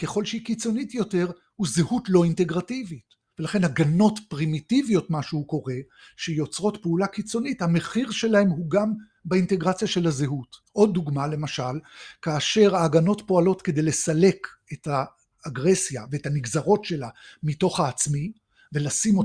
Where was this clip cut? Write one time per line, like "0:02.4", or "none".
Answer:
0:03.3
0:10.6